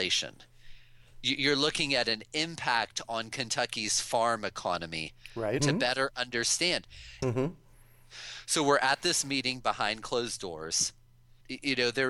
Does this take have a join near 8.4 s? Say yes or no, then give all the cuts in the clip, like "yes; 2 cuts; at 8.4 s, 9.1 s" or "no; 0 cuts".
no; 2 cuts; at 5.6 s, 7.2 s